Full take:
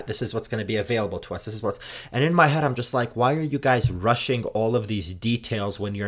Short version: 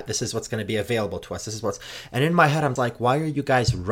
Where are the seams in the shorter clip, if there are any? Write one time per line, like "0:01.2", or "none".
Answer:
0:02.8